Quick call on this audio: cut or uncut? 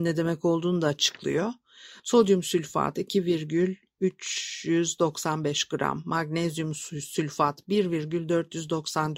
uncut